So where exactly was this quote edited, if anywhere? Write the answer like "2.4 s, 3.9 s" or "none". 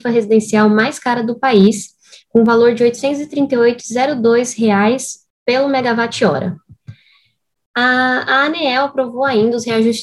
7.6 s